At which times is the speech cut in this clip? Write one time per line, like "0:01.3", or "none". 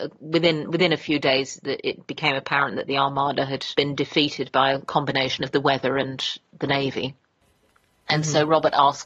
none